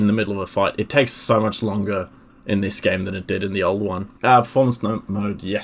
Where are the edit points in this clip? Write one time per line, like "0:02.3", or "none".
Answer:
0:04.2